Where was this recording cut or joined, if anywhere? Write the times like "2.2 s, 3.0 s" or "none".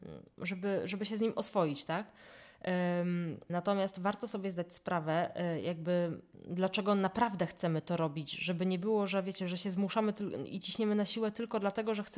3.5 s

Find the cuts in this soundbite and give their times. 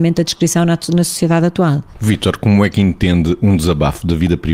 none

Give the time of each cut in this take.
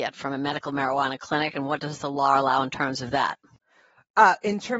none

